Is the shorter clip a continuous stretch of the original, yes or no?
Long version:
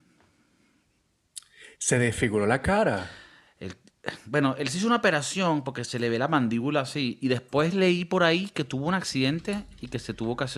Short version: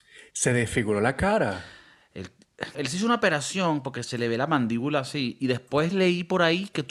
no